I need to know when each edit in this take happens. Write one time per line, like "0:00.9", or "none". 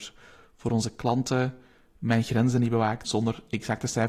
0:03.0